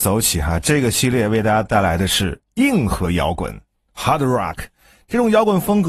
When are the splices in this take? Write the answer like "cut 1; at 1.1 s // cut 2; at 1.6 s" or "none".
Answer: none